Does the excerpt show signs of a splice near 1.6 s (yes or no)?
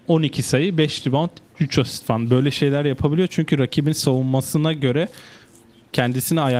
yes